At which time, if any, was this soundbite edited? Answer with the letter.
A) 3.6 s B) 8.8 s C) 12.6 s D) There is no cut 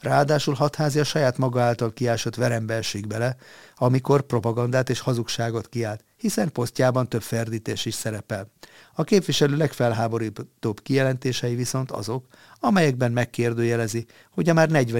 B